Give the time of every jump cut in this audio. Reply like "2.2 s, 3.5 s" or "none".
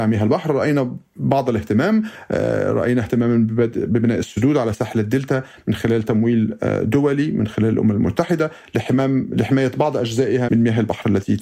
10.5 s